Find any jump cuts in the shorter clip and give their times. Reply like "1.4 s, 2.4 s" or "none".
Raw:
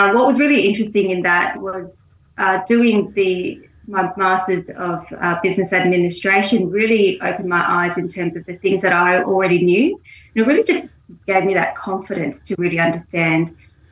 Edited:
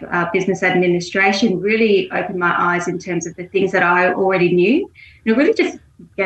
none